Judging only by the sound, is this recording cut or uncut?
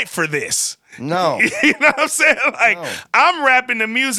uncut